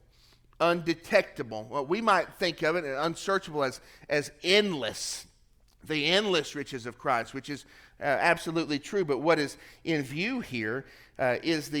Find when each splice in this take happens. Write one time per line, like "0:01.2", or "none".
none